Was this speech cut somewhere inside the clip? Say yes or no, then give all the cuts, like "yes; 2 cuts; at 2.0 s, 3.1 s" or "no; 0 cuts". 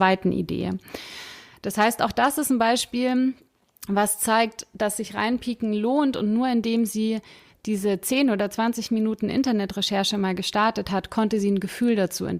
no; 0 cuts